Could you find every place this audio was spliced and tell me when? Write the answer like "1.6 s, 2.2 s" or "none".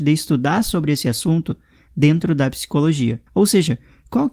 3.3 s